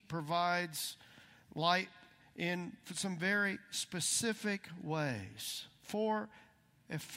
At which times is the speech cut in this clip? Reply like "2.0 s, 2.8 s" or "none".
none